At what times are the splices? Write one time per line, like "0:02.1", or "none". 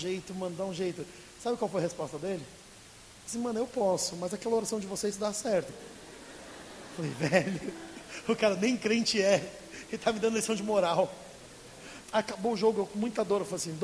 0:05.7
0:12.0